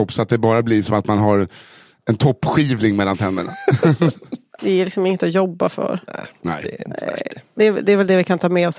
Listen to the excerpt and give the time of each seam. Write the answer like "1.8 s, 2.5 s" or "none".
4.6 s